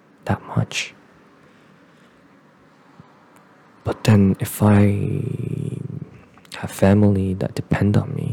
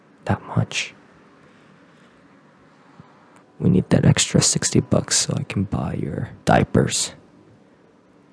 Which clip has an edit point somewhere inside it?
second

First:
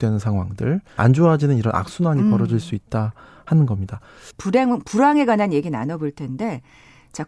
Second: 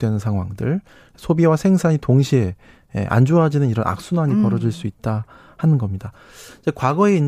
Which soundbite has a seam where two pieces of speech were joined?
first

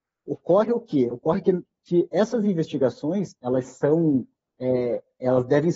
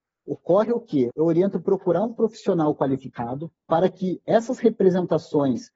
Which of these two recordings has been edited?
second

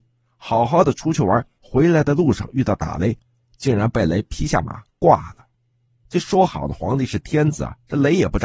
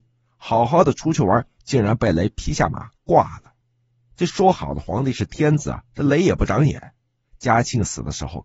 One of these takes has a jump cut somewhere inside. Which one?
second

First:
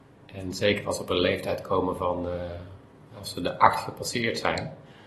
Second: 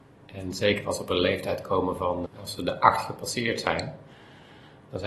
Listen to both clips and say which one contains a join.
second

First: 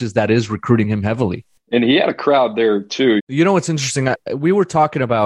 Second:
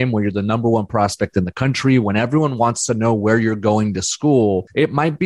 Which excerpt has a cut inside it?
first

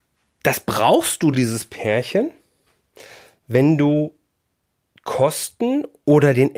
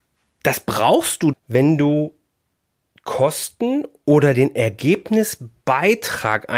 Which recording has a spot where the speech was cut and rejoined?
second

